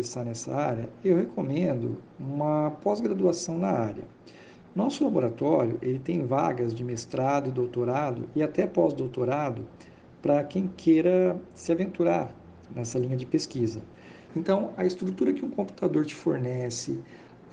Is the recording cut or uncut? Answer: cut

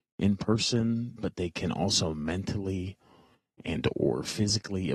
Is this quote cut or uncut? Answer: cut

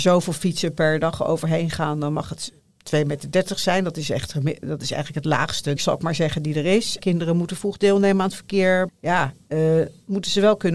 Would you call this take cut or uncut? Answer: cut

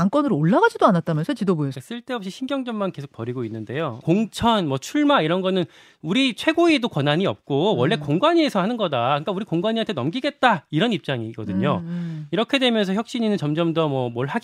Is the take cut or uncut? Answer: cut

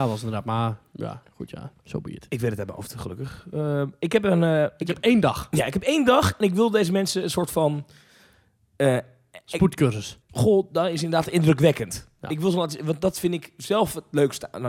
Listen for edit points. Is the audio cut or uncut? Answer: cut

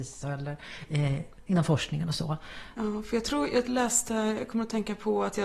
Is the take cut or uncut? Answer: cut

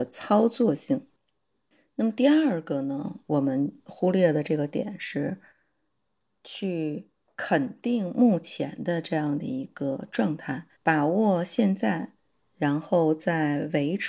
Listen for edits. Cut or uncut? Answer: cut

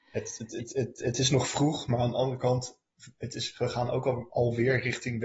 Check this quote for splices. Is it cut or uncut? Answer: uncut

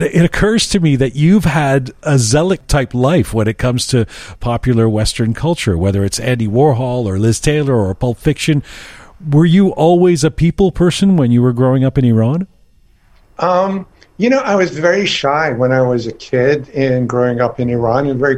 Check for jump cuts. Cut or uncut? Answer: uncut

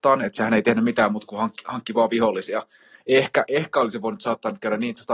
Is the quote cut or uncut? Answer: cut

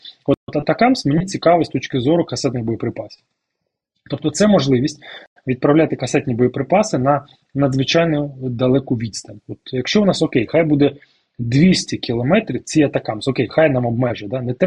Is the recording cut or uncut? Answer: uncut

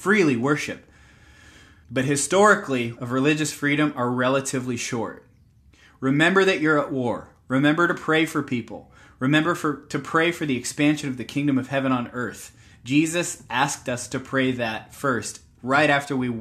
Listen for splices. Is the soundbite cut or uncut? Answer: cut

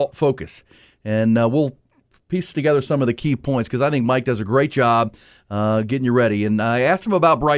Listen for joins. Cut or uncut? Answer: uncut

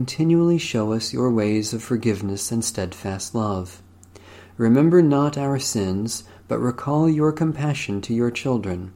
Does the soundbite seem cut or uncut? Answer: uncut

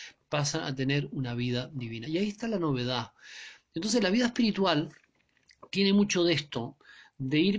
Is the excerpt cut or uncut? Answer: uncut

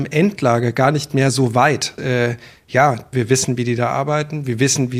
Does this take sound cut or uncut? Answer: cut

